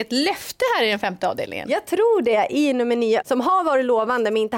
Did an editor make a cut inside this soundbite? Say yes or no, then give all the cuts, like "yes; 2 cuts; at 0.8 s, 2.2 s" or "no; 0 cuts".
yes; 1 cut; at 3.2 s